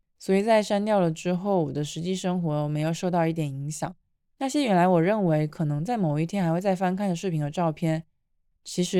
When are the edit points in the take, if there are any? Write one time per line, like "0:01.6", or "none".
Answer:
0:04.3